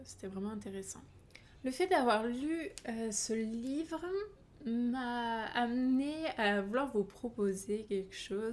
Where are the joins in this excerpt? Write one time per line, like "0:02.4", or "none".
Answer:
none